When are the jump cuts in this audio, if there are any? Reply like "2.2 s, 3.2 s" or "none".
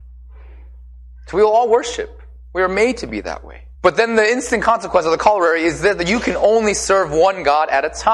3.7 s